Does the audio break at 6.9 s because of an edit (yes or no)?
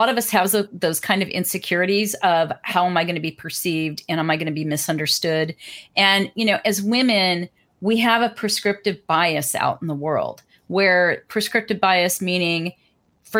no